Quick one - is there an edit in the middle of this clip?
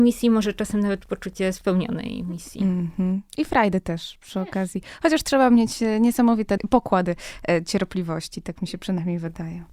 no; 0 cuts

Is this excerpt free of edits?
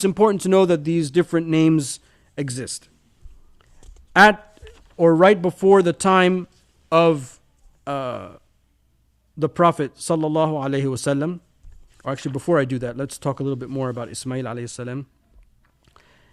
yes; 0 cuts

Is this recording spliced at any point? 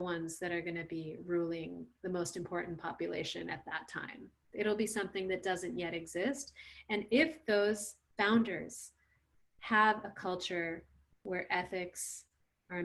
no; 0 cuts

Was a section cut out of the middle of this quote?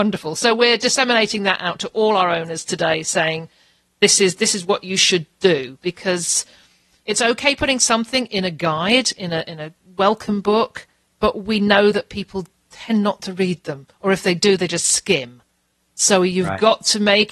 no; 0 cuts

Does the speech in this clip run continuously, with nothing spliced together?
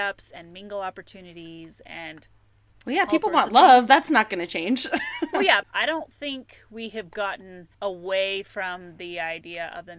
no; 2 cuts; at 5.6 s, 7.7 s

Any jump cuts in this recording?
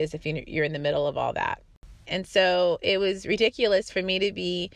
yes; 1 cut; at 2.1 s

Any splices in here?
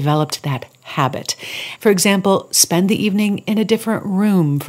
yes; 1 cut; at 1.8 s

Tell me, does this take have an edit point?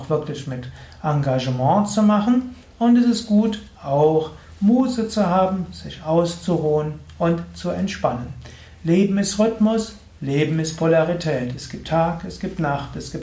no; 0 cuts

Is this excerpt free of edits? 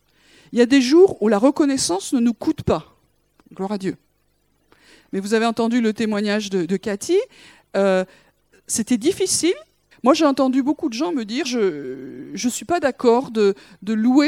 no; 2 cuts; at 9.9 s, 11.4 s

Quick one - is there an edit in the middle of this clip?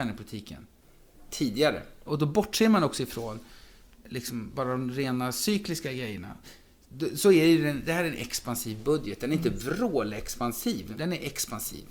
yes; 2 cuts; at 2.1 s, 10.9 s

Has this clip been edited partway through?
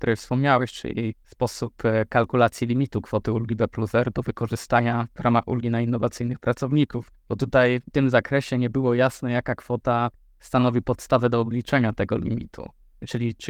yes; 2 cuts; at 1.2 s, 7.2 s

